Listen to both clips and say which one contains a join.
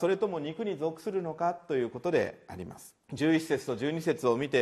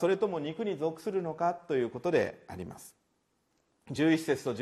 first; 1 cut; at 3.0 s

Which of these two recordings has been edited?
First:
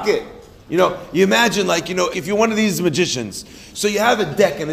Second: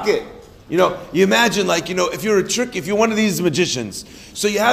first; 1 cut; at 2.1 s

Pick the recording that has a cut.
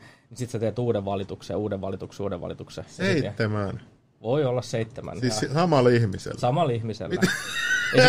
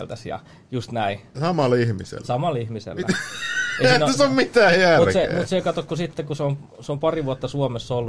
second; 1 cut; at 1.3 s

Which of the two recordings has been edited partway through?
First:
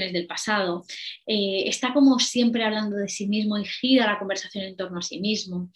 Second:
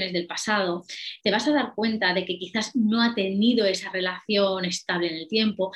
second; 1 cut; at 1.2 s

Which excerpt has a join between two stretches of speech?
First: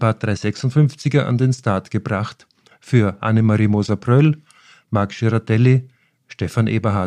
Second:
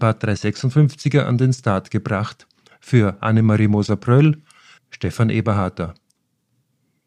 second; 1 cut; at 4.8 s

